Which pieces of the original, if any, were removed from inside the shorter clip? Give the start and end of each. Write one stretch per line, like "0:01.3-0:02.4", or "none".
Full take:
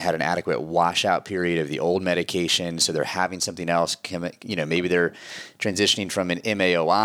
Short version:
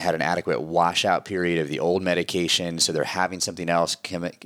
none